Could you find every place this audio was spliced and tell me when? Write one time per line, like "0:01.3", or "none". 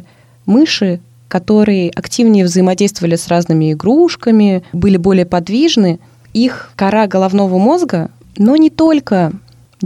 0:08.2